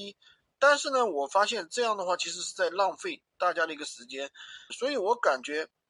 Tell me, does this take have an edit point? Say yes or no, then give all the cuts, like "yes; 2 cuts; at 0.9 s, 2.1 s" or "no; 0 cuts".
yes; 1 cut; at 4.7 s